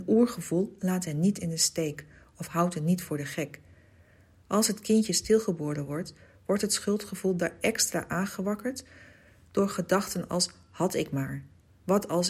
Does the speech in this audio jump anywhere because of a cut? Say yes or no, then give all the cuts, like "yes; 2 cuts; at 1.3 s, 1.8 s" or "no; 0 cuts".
no; 0 cuts